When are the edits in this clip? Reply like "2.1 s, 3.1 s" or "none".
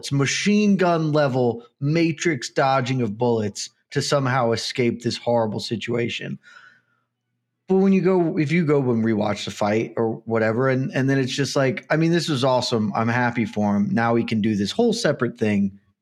none